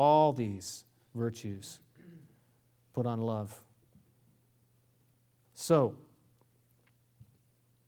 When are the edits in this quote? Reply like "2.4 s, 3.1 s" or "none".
5.4 s